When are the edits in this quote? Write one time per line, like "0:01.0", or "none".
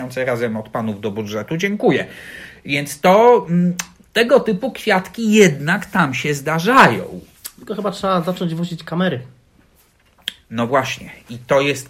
none